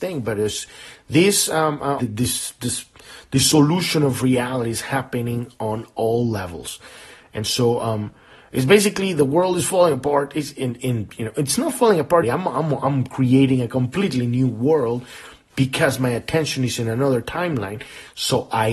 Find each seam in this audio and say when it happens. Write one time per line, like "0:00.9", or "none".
0:02.0
0:12.2